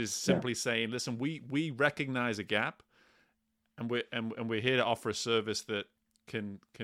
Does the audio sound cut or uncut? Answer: uncut